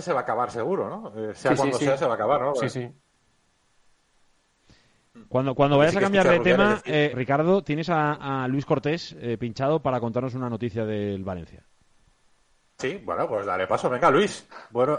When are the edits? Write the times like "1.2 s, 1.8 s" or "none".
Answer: 7.1 s

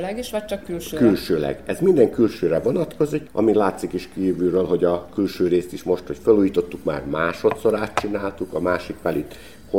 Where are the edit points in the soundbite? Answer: none

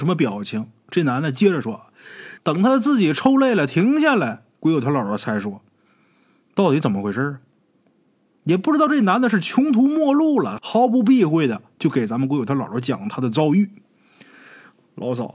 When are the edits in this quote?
2.4 s, 10.6 s

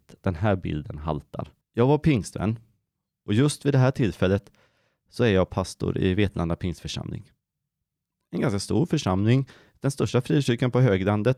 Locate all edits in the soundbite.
1.6 s

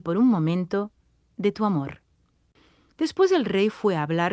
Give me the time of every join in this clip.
none

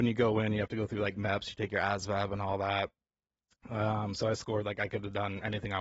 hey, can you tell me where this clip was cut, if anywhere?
none

